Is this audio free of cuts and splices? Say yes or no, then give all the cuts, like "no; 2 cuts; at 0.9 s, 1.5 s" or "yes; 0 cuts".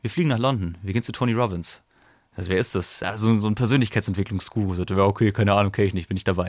yes; 0 cuts